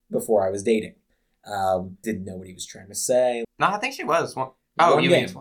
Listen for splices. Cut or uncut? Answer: cut